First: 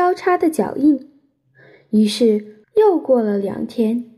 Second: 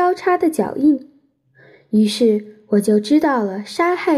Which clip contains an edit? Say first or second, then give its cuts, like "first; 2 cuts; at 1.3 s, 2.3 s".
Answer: first; 1 cut; at 2.6 s